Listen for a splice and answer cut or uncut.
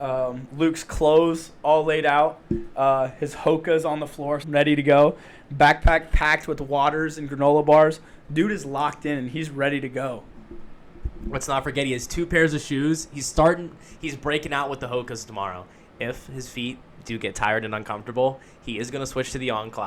cut